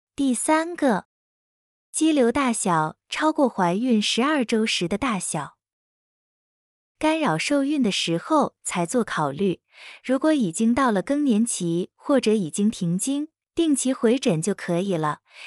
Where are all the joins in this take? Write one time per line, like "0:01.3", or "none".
0:07.0
0:13.4